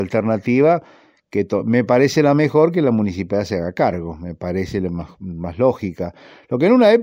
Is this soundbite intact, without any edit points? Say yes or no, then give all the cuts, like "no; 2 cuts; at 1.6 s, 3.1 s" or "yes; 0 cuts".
yes; 0 cuts